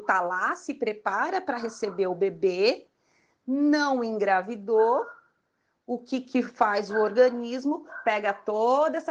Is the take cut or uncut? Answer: uncut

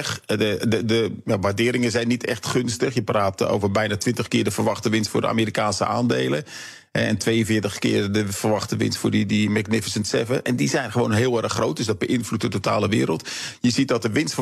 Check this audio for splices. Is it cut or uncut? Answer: uncut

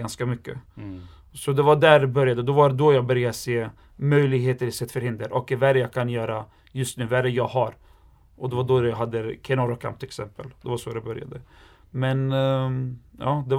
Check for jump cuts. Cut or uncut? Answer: uncut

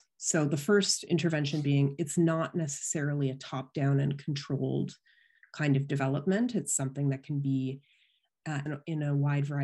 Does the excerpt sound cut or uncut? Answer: cut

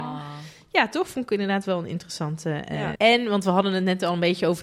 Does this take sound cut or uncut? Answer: cut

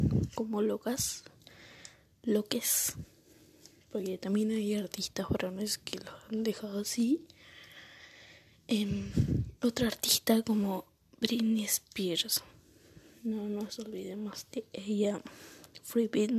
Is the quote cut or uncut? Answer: uncut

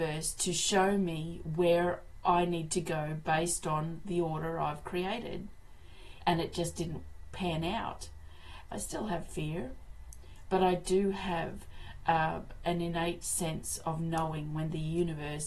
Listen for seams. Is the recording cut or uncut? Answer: cut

